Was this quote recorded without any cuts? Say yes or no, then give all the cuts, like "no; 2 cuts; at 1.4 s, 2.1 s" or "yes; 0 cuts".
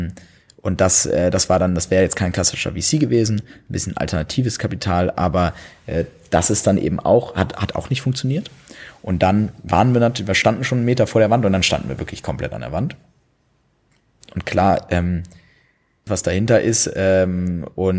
no; 1 cut; at 16.1 s